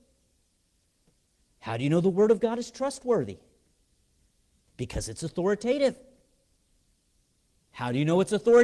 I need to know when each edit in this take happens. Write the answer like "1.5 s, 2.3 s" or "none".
none